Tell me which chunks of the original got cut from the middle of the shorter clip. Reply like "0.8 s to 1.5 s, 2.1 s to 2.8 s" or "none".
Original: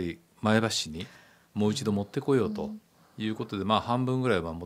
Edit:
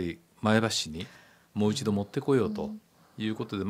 none